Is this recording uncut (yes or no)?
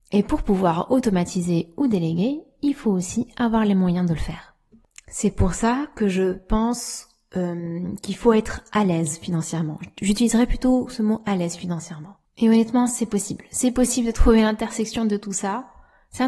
yes